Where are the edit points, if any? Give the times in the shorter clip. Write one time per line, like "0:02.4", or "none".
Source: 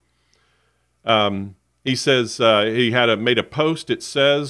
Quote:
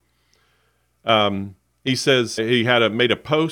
0:02.4